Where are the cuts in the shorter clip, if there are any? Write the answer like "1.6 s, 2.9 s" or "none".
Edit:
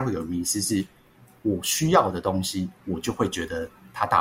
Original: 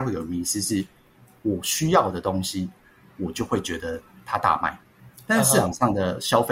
2.8 s